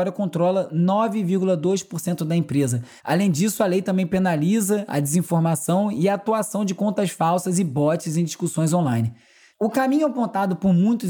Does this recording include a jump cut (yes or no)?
yes